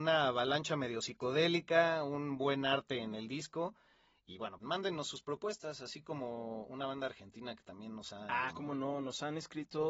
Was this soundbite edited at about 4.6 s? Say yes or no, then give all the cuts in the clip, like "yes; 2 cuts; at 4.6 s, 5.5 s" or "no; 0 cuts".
yes; 2 cuts; at 4.6 s, 8.5 s